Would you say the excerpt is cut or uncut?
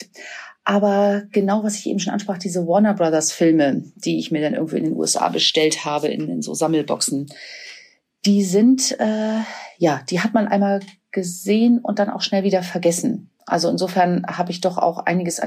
uncut